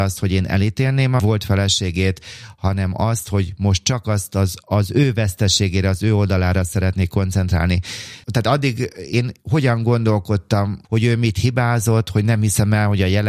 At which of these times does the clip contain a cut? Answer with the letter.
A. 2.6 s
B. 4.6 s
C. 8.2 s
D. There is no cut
C